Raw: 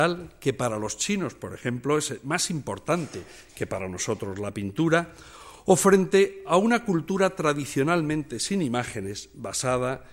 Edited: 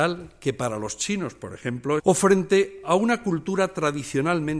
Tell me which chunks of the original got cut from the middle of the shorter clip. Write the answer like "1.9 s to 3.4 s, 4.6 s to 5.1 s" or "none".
2.0 s to 5.6 s